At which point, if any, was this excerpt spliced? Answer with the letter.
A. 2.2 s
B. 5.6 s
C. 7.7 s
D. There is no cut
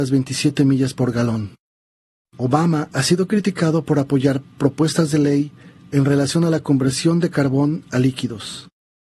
A